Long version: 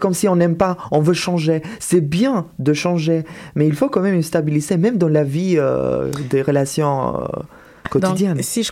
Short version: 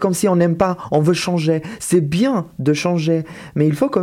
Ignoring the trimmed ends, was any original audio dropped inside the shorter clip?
no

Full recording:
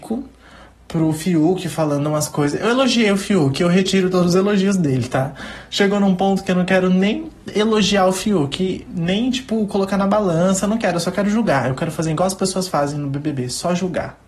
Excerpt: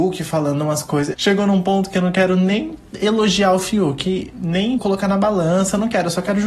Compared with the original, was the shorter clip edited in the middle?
yes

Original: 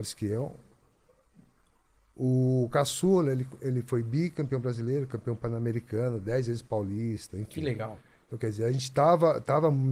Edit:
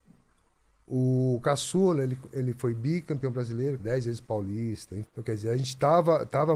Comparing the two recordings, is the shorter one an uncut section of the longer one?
no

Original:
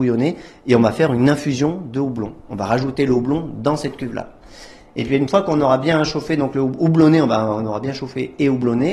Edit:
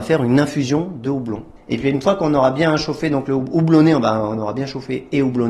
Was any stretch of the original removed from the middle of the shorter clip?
yes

